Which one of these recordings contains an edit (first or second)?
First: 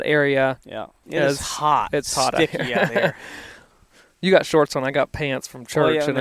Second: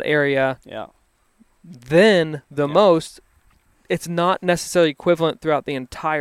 first